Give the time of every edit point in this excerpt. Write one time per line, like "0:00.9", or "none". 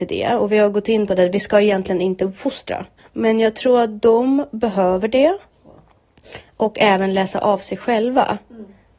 0:03.0
0:05.5